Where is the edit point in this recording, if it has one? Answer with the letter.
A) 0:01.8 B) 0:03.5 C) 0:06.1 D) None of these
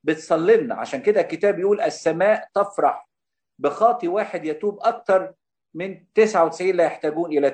C